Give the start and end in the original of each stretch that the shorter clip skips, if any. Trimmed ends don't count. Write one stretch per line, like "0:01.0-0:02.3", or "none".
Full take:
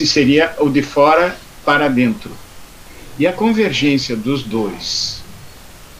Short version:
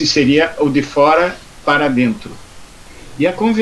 none

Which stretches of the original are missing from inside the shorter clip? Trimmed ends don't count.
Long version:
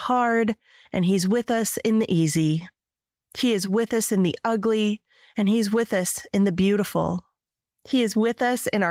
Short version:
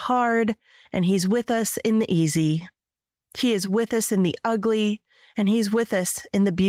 none

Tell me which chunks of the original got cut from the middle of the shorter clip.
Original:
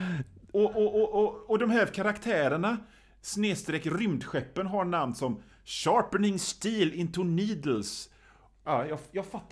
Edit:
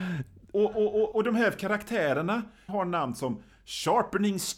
0:01.1-0:01.5
0:03.0-0:04.7

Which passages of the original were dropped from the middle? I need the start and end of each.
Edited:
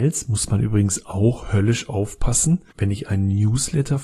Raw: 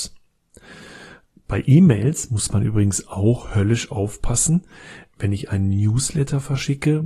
0:04.7-0:05.1

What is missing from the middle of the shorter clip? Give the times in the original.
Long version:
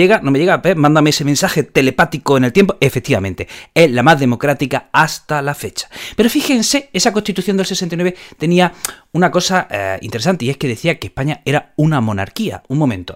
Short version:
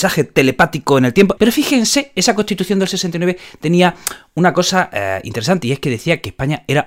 0:02.8-0:06.2

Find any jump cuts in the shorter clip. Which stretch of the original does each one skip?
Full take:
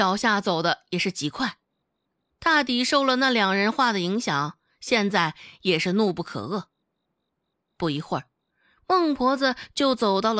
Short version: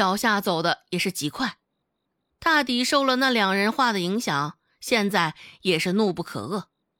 none

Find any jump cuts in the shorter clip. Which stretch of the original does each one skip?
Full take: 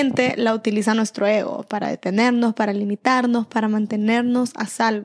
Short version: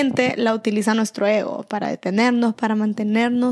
0:02.5-0:03.5

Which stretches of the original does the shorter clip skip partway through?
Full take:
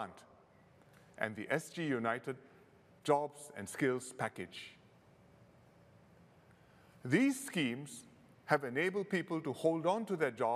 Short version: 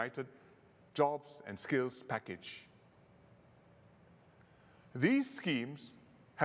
none

